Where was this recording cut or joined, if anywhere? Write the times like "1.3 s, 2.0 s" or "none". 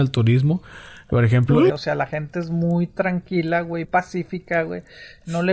1.7 s, 3.8 s

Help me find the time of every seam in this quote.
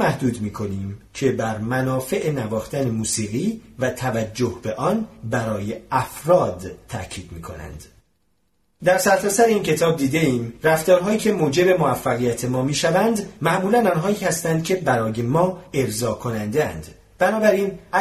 none

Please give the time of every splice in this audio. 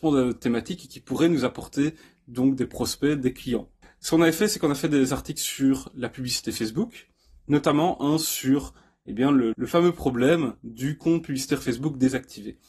9.5 s

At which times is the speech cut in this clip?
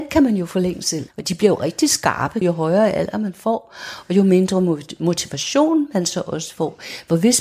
1.1 s, 2.4 s

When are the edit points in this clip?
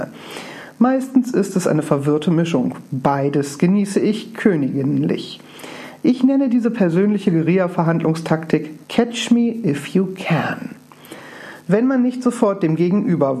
8.8 s, 11.6 s

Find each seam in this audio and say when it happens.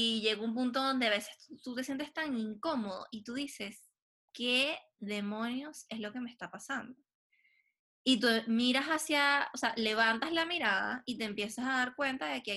none

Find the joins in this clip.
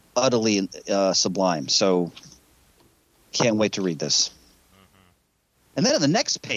none

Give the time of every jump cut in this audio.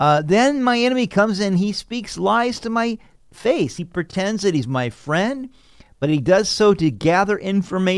none

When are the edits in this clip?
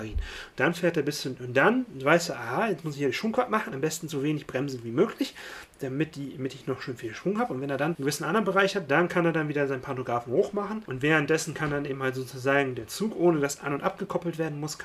none

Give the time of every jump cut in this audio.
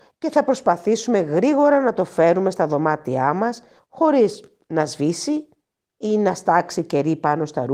3.8 s

